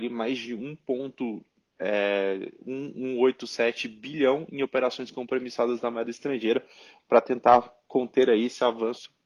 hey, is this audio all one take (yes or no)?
yes